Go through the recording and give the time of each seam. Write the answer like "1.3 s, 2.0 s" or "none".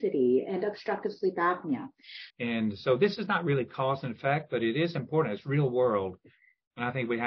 2.3 s